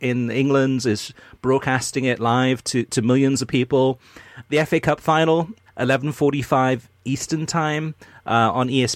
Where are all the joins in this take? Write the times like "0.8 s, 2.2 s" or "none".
4.5 s, 5.7 s